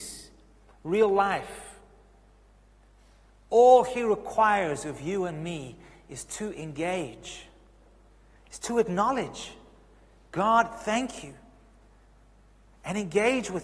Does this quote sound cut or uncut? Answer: uncut